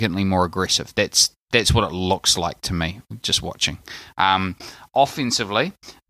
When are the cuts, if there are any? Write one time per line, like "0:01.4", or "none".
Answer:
none